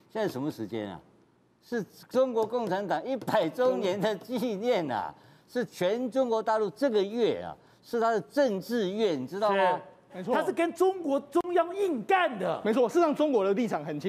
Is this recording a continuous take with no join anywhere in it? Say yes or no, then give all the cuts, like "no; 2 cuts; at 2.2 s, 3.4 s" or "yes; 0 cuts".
no; 1 cut; at 10.1 s